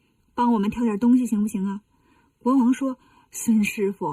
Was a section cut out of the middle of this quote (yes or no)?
no